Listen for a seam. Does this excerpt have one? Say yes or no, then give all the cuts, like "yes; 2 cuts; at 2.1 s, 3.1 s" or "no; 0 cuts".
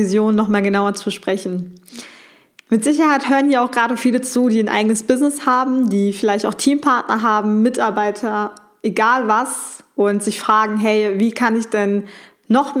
no; 0 cuts